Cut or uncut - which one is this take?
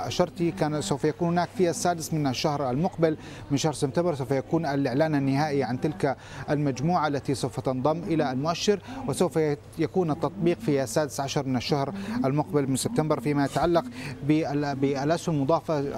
cut